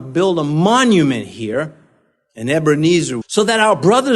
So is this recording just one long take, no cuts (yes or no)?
no